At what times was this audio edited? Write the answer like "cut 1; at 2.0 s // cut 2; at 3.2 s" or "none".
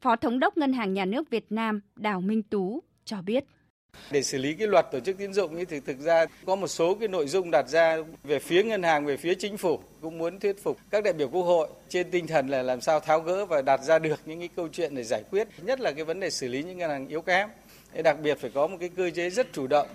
none